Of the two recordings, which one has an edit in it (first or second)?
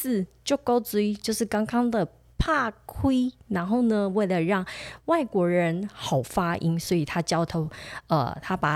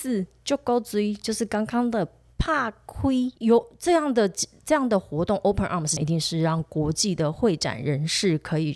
second